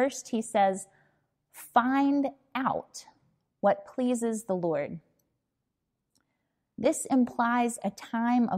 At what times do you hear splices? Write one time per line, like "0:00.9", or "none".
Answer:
none